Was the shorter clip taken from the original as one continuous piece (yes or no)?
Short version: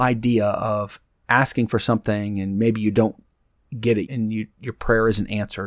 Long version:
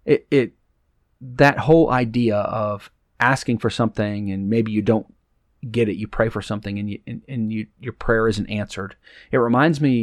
no